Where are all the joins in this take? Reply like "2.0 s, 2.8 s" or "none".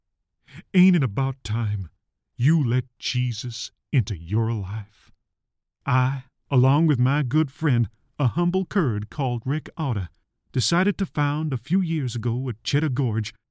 none